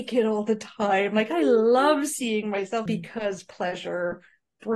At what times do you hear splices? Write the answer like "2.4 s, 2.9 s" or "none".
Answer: 2.9 s